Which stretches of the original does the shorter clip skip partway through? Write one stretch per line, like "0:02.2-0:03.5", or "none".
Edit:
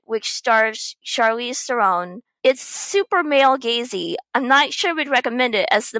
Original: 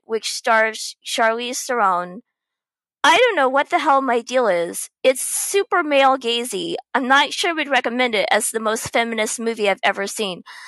0:02.4-0:05.0